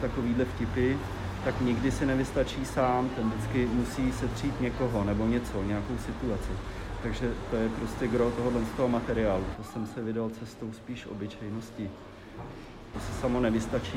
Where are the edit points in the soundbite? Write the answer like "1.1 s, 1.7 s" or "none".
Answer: 9.5 s, 12.9 s